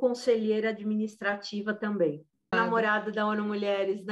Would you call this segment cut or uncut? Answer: cut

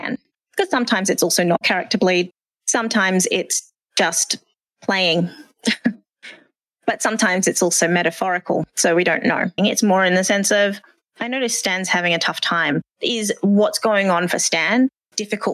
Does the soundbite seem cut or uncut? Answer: cut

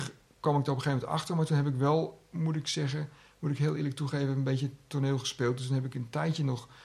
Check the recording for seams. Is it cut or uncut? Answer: uncut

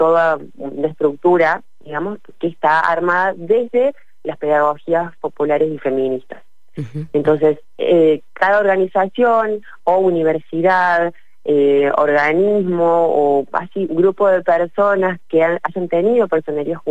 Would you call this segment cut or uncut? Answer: cut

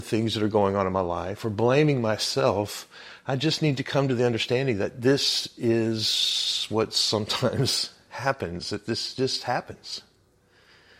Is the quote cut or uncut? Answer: uncut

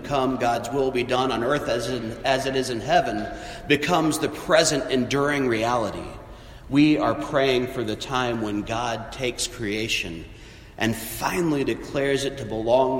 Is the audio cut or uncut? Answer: uncut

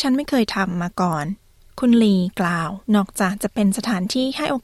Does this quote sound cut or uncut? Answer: cut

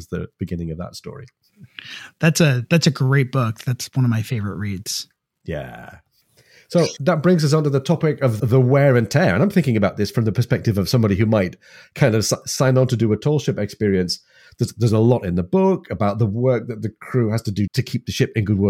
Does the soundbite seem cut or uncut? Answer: cut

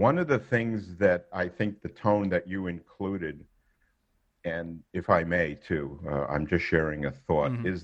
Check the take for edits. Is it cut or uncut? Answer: uncut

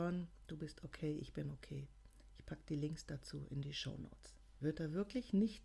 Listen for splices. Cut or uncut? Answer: cut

